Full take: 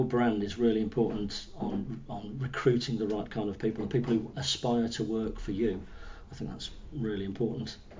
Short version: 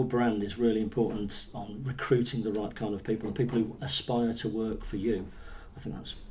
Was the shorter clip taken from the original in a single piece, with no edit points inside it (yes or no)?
no